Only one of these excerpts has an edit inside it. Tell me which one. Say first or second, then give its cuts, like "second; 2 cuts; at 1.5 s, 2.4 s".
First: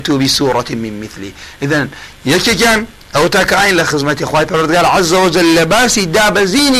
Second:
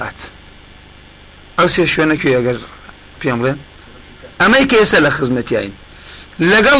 second; 2 cuts; at 2.2 s, 4.3 s